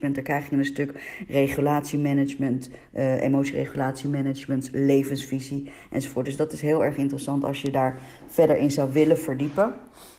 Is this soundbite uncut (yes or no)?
yes